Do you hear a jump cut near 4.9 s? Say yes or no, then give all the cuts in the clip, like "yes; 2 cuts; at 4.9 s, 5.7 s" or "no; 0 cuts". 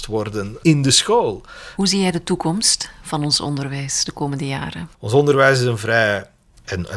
yes; 1 cut; at 4.9 s